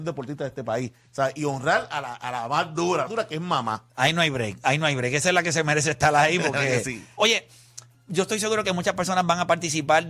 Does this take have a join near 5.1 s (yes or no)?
no